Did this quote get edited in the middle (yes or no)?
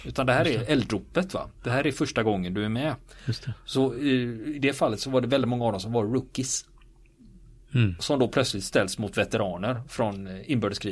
no